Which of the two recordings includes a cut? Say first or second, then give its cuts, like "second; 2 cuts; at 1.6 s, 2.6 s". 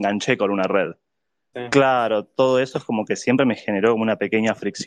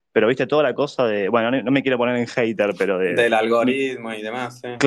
first; 1 cut; at 1.5 s